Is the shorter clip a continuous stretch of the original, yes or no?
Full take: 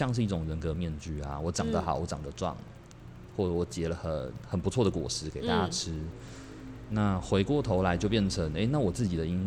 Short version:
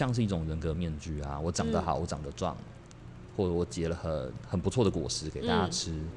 yes